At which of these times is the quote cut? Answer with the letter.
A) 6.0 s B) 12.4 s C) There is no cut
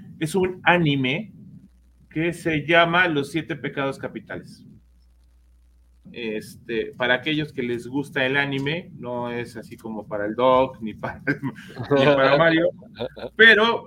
A